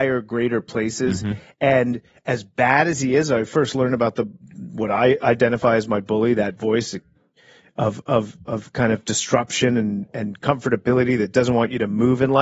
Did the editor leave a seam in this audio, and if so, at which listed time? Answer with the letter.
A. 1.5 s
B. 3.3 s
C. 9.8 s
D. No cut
D